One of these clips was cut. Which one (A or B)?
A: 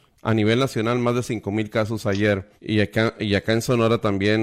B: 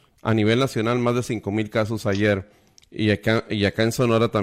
A